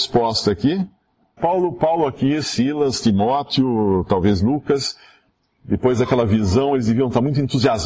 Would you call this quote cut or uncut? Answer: cut